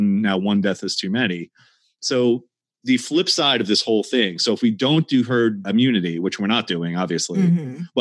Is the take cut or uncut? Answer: uncut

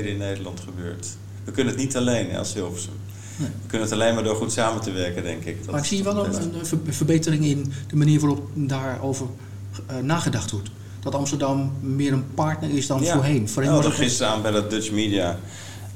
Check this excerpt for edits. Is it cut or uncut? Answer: uncut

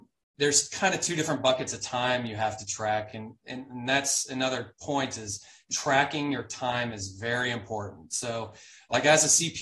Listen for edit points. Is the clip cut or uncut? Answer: uncut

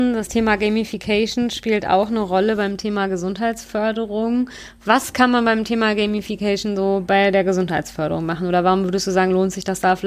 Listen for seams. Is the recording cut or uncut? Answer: uncut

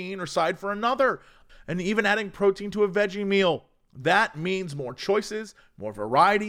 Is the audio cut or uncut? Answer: cut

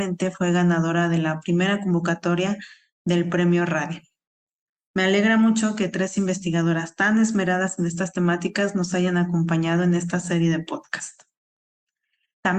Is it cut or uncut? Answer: uncut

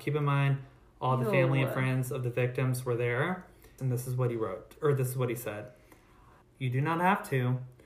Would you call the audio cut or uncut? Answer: cut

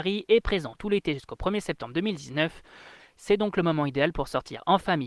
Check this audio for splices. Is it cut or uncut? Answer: cut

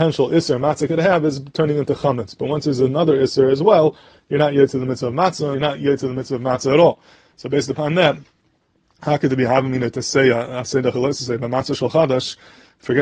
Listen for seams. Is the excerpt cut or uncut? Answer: cut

